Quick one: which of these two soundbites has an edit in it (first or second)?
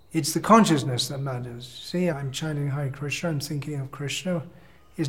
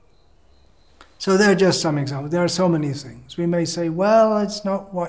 first